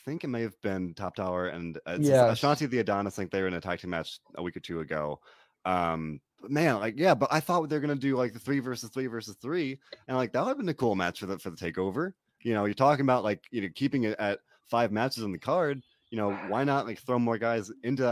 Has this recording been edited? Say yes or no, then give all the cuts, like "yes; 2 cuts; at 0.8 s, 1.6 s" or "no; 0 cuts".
yes; 1 cut; at 6.3 s